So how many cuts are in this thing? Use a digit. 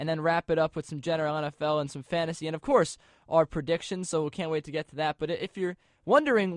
0